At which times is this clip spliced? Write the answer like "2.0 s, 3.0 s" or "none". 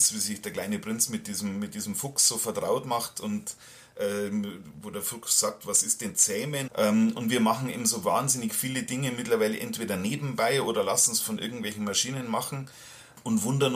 6.7 s